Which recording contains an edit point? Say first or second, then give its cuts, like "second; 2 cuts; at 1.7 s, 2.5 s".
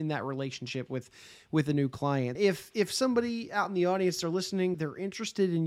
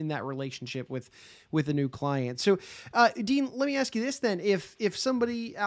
first; 2 cuts; at 2.4 s, 4.7 s